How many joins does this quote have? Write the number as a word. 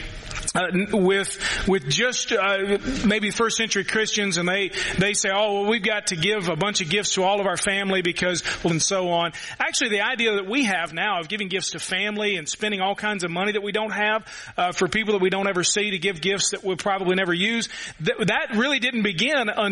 one